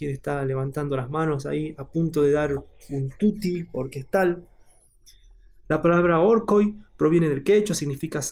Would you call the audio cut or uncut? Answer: uncut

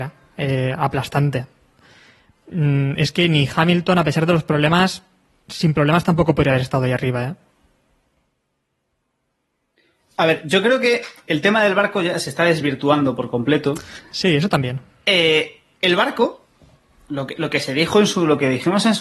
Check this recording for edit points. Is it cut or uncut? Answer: uncut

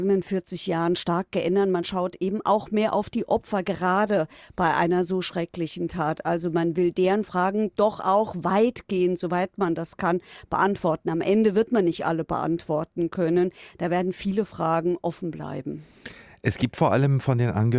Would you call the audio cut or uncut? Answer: uncut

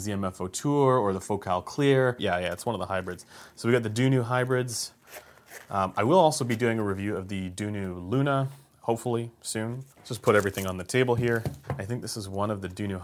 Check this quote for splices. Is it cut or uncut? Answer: cut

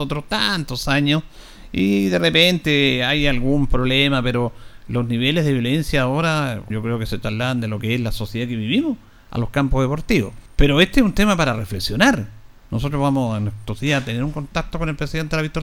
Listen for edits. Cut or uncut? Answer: cut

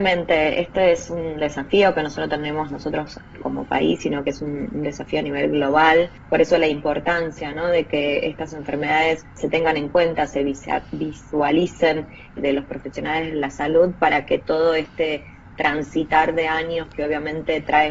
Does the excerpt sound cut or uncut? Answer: cut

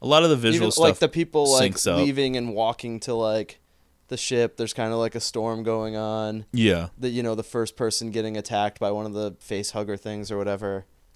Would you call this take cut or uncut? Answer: uncut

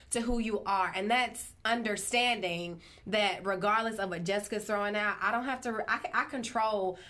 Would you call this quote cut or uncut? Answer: uncut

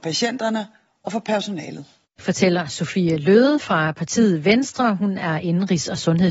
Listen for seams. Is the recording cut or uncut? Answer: uncut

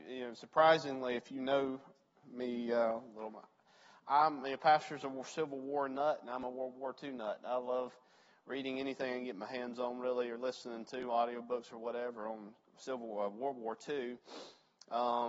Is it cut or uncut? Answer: uncut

